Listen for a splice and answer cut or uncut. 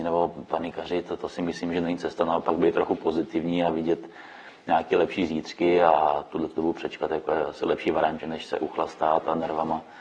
cut